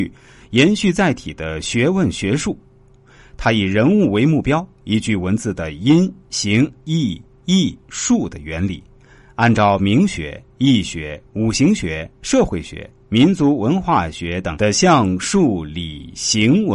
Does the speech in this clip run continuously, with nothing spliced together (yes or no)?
yes